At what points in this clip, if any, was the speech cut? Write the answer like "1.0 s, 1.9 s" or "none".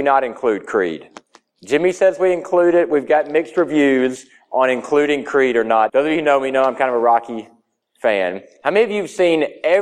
5.9 s